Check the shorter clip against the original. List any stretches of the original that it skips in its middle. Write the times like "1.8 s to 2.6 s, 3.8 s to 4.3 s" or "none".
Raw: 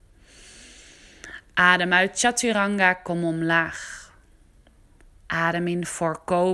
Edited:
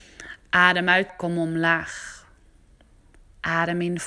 2.1 s to 3.0 s